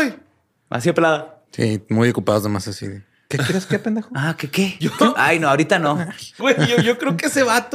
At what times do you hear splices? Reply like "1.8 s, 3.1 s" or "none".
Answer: 6.4 s